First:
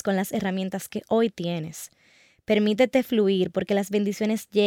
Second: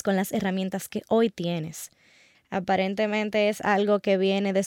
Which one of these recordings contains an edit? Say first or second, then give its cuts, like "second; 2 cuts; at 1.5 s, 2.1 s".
second; 1 cut; at 2.3 s